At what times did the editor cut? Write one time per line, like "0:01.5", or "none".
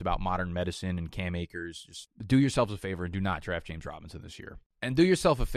none

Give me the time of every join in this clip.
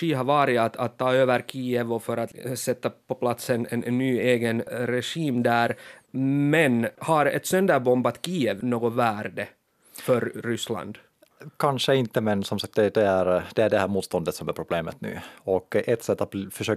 none

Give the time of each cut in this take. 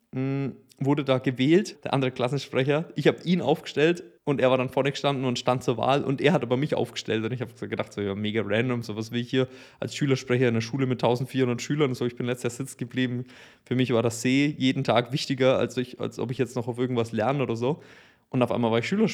0:01.7
0:04.2

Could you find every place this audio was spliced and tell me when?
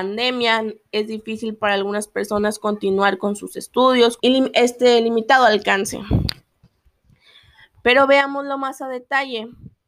0:04.2

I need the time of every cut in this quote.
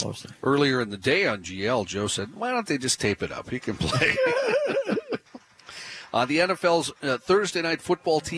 none

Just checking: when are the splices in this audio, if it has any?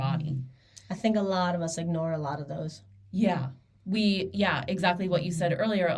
none

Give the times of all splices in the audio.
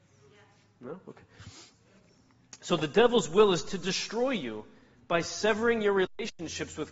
none

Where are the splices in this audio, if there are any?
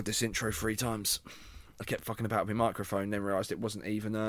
none

